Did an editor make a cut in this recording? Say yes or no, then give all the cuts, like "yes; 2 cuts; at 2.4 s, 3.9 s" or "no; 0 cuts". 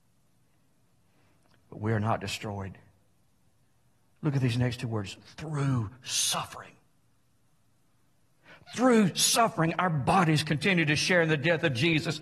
no; 0 cuts